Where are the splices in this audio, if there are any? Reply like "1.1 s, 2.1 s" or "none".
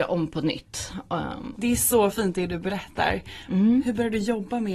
1.5 s, 3.5 s

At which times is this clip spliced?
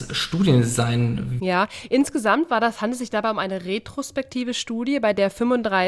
1.4 s

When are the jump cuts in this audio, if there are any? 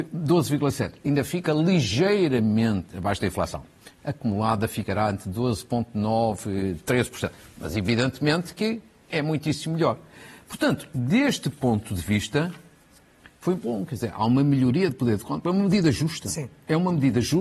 none

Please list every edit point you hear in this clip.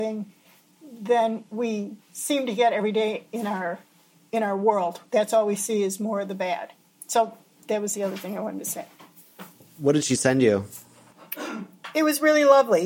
none

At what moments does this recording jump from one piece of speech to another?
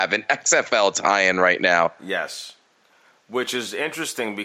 none

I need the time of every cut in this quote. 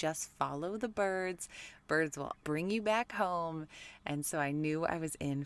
2.4 s

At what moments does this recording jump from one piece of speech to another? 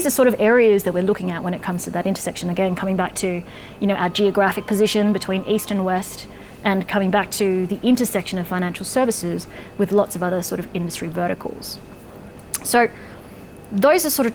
none

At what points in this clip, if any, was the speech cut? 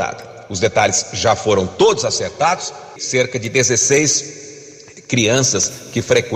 3.0 s

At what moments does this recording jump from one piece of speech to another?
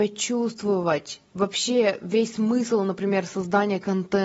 none

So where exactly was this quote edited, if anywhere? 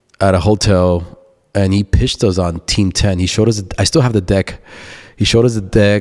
none

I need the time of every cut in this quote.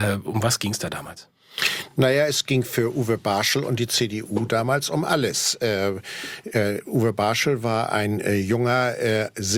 none

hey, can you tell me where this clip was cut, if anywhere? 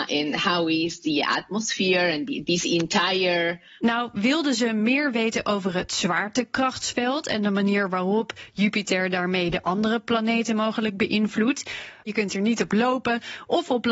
3.8 s, 12.1 s

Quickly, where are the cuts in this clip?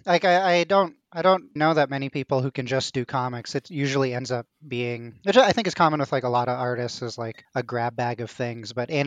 1.6 s

